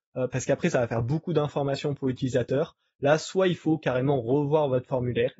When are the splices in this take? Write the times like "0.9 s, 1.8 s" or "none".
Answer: none